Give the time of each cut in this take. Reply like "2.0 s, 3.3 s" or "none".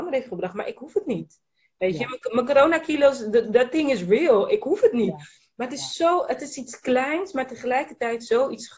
none

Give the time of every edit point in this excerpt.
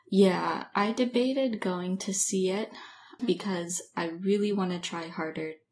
3.2 s

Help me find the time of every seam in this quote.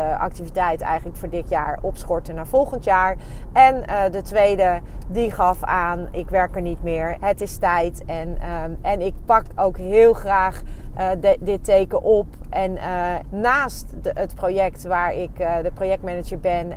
7.2 s, 13.2 s

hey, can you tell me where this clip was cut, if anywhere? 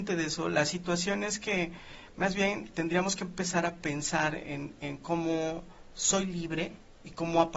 2.7 s

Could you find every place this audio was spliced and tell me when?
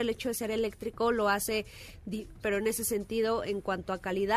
2.4 s

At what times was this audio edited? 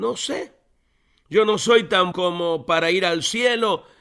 2.1 s

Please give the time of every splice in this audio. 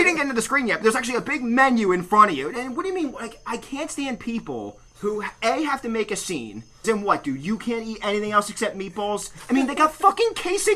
4.9 s, 6.8 s

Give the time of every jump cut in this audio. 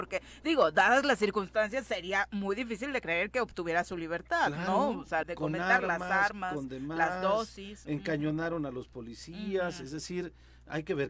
5.2 s

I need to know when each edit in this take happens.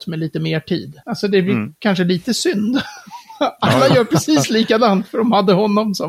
1.0 s

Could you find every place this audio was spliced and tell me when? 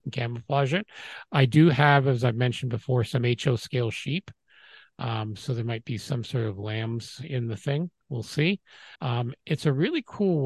8.9 s

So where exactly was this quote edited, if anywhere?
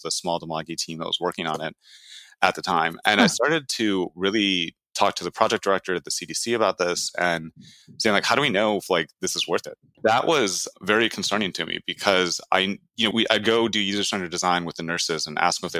9.9 s, 13.1 s

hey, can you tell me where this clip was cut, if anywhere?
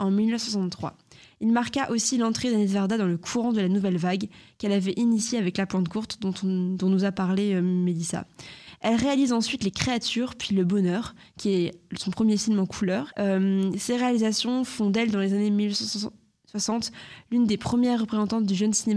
13.1 s

